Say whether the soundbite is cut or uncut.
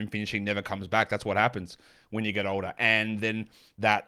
uncut